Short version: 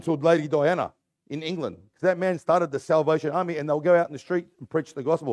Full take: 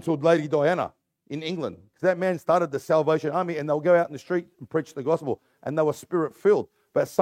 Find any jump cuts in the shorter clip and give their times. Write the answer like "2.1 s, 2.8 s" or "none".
none